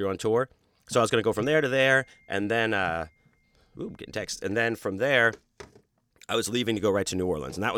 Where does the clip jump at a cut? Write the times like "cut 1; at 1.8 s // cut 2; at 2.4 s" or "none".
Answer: none

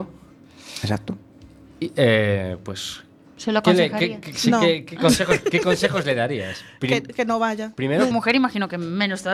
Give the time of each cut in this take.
cut 1; at 8.1 s

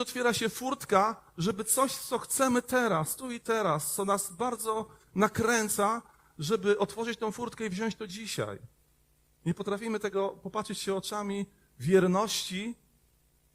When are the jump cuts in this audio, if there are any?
none

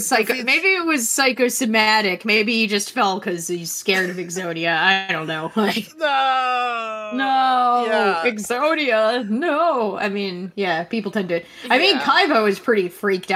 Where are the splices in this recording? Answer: none

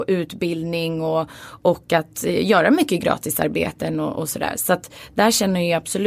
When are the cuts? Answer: none

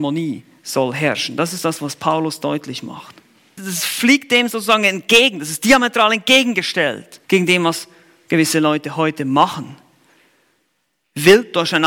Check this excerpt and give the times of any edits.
cut 1; at 3.6 s // cut 2; at 7.2 s

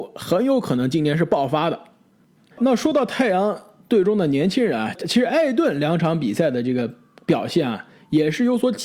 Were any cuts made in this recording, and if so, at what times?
cut 1; at 2.5 s

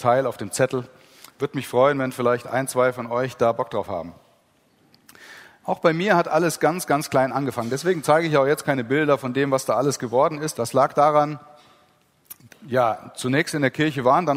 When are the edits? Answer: cut 1; at 10.5 s // cut 2; at 12.5 s

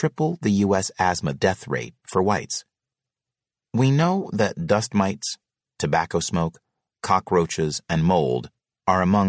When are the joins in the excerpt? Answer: cut 1; at 5.6 s

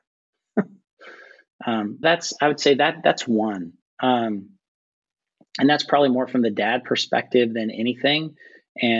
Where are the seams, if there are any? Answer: cut 1; at 2.0 s

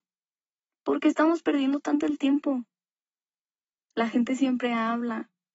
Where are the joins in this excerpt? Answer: cut 1; at 3.9 s

